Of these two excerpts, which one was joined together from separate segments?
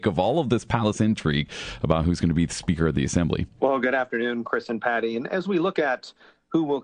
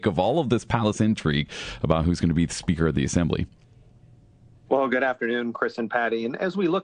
first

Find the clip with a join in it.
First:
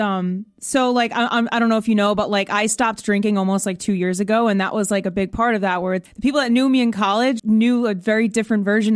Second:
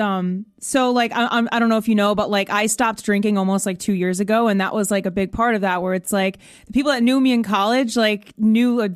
first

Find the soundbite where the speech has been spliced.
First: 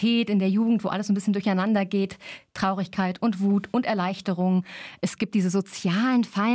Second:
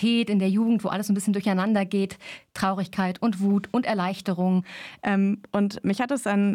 second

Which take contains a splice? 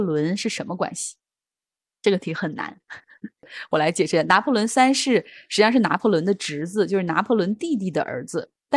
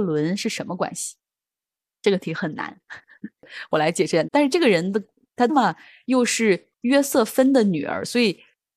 second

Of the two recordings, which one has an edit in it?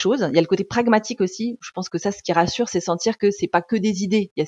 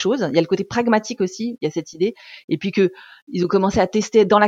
second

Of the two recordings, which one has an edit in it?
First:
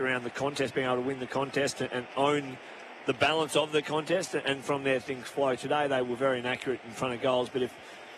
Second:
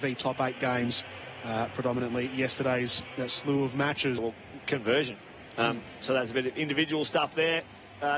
second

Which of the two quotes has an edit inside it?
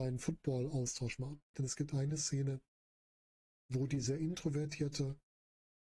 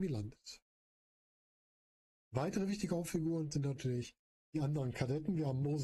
first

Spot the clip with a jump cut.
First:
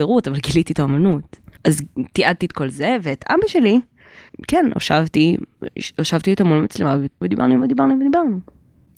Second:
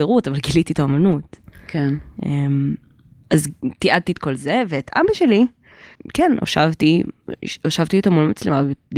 first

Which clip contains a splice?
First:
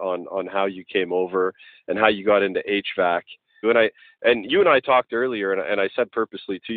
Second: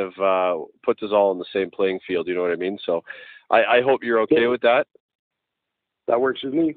first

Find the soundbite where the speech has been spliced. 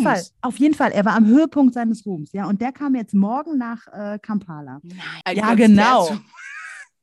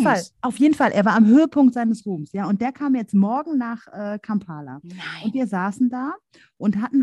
first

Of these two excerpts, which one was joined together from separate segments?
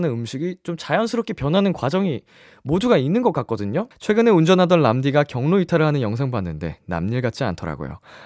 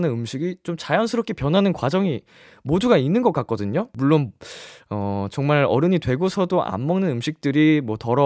first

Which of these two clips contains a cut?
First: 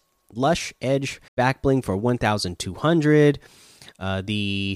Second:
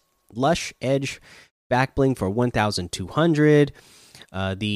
first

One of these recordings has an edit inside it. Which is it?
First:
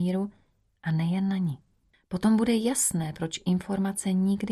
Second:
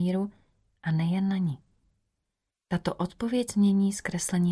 first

